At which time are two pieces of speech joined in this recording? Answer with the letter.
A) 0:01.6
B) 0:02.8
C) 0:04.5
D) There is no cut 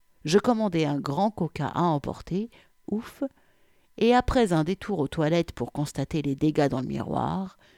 B